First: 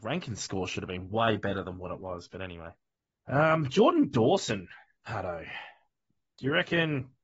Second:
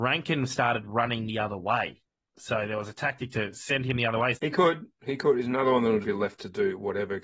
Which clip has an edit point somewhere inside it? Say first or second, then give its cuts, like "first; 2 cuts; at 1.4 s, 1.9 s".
second; 2 cuts; at 4.3 s, 6.0 s